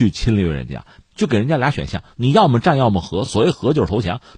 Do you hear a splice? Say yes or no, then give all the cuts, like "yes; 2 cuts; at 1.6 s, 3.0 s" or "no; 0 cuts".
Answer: no; 0 cuts